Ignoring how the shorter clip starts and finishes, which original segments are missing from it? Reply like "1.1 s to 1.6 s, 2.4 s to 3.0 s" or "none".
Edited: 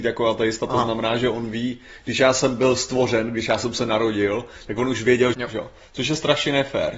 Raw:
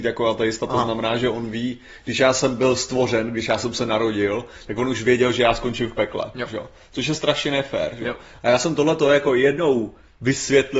5.3 s to 6.3 s